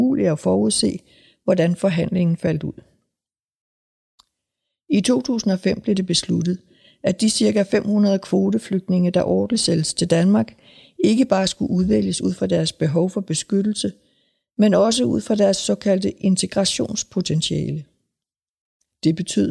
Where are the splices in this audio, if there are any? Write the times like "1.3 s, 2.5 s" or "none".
none